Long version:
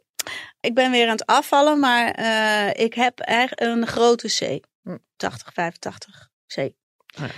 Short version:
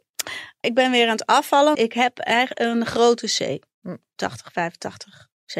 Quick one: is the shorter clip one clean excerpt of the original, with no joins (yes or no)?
no